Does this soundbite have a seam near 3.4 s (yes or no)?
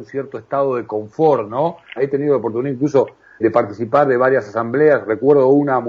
yes